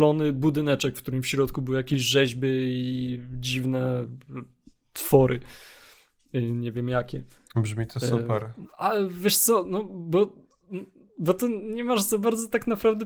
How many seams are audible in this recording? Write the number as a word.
one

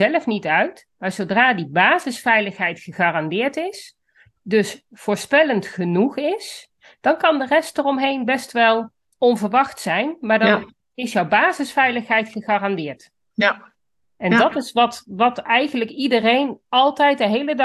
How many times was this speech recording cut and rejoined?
one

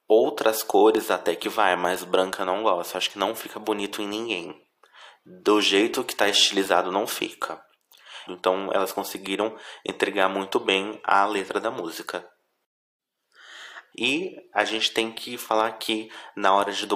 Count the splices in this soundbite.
two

